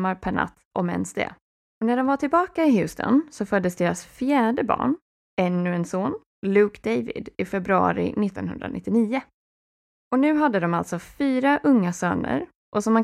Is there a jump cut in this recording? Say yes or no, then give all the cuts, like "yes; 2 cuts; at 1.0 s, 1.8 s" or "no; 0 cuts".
yes; 1 cut; at 1.6 s